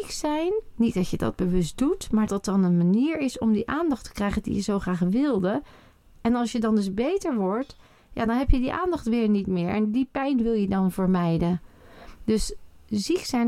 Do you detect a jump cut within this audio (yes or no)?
yes